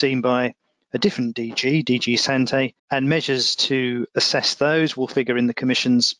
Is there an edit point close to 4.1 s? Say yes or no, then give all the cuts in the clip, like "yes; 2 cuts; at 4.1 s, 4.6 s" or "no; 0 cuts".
yes; 2 cuts; at 2.8 s, 4.1 s